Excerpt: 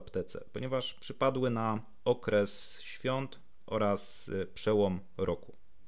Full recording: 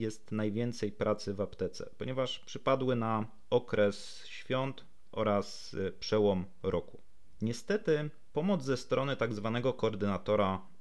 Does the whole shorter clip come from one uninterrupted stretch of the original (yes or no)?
yes